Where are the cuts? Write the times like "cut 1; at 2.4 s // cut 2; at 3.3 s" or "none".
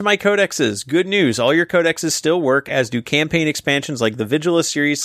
none